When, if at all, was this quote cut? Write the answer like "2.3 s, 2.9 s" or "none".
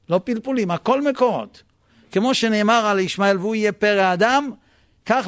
none